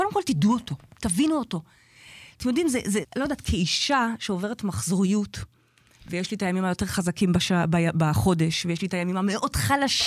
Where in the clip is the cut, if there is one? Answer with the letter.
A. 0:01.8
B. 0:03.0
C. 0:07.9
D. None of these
B